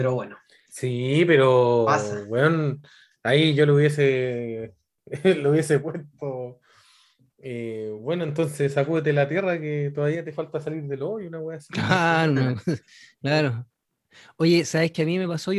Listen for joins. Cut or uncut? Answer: uncut